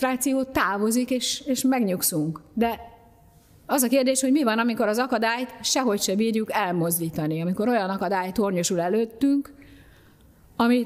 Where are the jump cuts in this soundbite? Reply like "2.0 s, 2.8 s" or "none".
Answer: none